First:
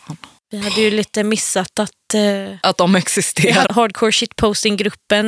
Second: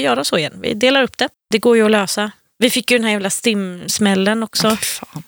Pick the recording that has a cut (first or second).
first